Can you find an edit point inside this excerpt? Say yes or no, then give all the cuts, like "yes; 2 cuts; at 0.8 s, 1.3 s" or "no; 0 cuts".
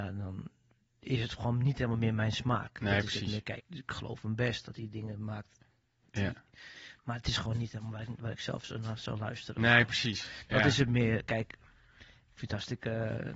yes; 1 cut; at 3.6 s